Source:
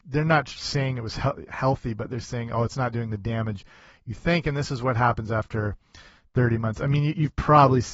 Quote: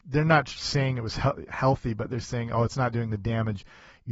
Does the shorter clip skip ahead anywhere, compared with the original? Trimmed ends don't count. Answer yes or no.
no